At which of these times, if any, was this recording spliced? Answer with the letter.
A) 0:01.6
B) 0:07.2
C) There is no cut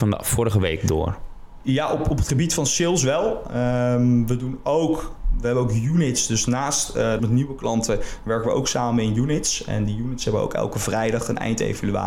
B